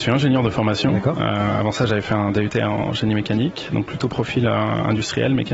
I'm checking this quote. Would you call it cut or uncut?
uncut